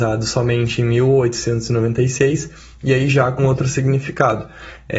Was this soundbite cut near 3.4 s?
yes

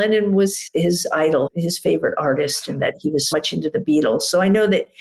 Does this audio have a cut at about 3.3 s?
yes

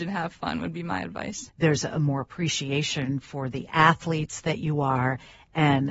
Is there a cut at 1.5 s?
yes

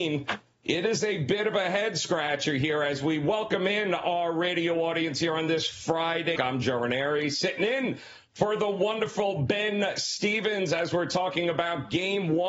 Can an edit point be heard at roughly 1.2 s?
no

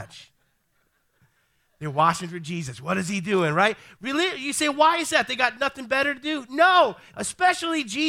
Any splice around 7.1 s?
yes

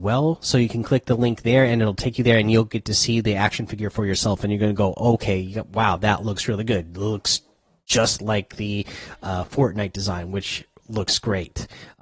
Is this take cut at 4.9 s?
no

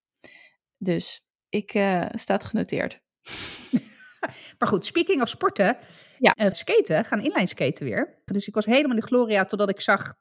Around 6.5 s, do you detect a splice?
yes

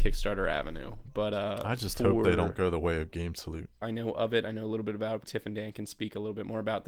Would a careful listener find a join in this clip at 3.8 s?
yes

